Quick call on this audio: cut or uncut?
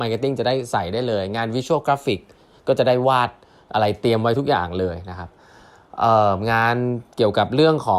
uncut